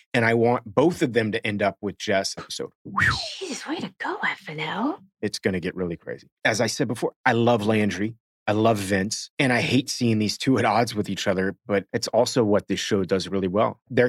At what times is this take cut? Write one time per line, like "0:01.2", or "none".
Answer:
0:02.4

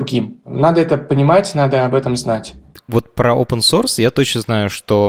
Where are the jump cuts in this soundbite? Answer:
none

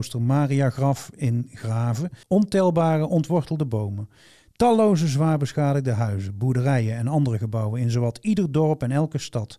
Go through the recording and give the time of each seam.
0:02.2

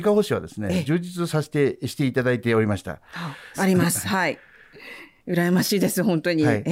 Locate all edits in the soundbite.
0:03.5

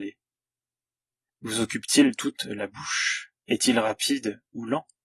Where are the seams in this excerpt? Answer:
0:01.3
0:03.4

